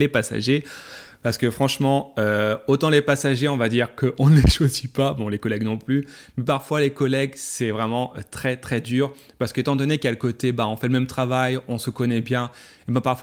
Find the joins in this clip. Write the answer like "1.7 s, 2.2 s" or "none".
none